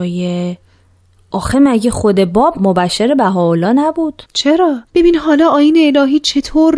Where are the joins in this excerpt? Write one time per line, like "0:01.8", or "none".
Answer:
0:04.8